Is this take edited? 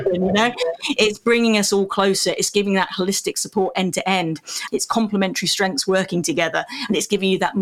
yes; 1 cut; at 4.7 s

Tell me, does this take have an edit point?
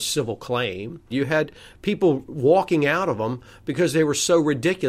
yes; 1 cut; at 1.1 s

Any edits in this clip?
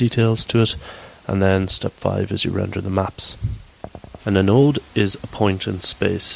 yes; 1 cut; at 4.2 s

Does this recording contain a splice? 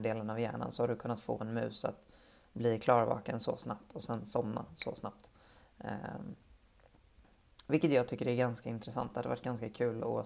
no; 0 cuts

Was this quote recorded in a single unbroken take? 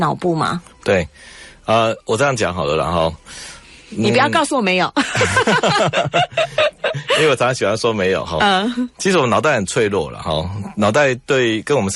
yes; 0 cuts

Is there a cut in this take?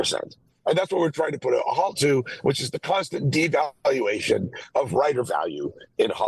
no; 0 cuts

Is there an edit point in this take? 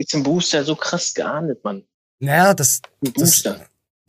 no; 0 cuts

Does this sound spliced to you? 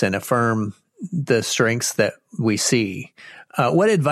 no; 0 cuts

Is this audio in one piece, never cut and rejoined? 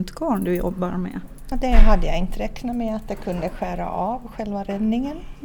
no; 1 cut; at 1.5 s

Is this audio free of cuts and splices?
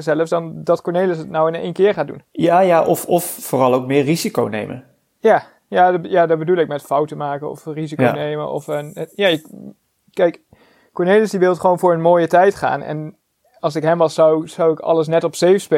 yes; 0 cuts

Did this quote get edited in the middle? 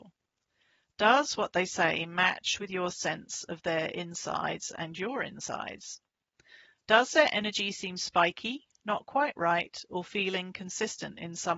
no; 0 cuts

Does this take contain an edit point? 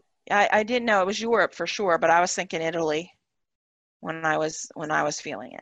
no; 0 cuts

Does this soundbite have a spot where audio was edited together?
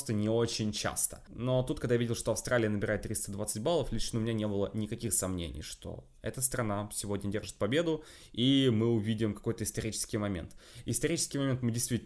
no; 0 cuts

